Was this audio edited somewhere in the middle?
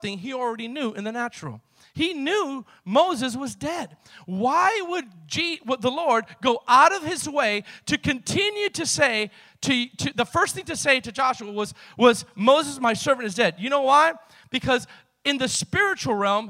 no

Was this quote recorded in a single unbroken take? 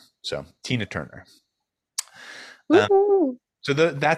yes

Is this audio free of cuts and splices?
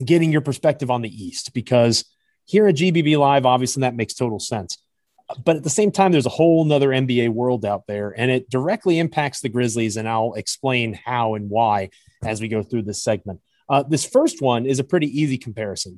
no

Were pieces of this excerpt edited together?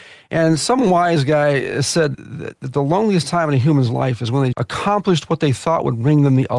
yes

